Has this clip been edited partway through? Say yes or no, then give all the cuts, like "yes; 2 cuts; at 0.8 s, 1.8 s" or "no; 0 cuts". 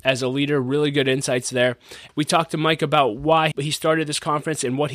yes; 2 cuts; at 2.1 s, 3.5 s